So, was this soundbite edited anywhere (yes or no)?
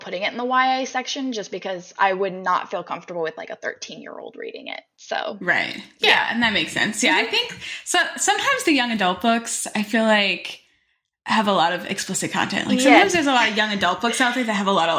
no